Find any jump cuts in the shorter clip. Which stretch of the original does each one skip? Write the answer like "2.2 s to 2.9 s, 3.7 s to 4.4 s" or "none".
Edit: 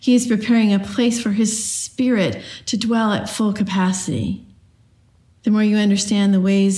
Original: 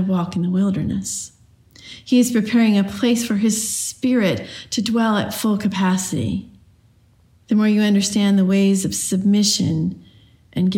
none